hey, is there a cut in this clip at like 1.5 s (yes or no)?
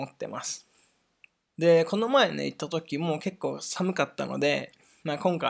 yes